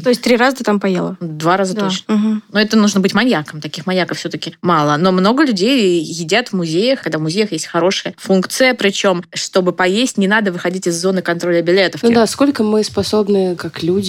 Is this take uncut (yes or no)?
no